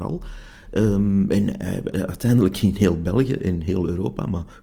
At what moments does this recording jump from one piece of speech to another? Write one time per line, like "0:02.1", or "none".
0:01.9